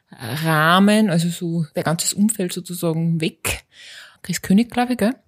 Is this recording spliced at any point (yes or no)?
yes